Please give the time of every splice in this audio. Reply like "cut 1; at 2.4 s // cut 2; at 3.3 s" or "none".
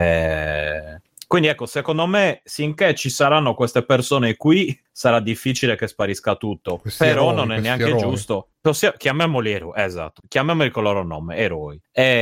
none